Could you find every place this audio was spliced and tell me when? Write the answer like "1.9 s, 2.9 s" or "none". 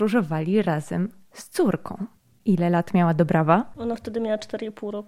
none